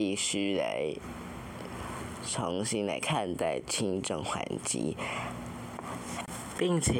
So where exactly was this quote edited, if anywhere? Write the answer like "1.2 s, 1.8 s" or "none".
none